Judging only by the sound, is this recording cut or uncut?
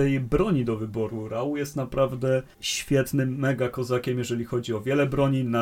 cut